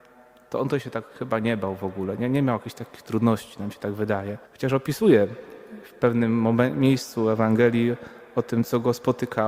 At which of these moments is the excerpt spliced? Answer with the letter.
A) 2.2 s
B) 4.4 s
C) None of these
B